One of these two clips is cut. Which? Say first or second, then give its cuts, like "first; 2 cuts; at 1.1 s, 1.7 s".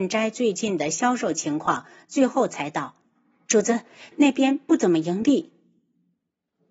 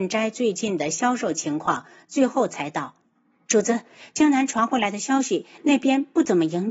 first; 1 cut; at 4.1 s